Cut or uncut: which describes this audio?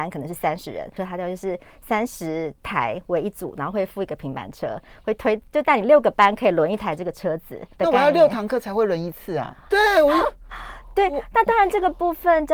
cut